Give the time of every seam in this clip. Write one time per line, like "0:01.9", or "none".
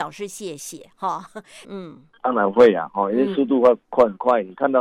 0:01.6